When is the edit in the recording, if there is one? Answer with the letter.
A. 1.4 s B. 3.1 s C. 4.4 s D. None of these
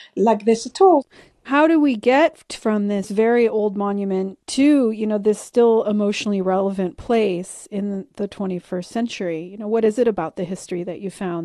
C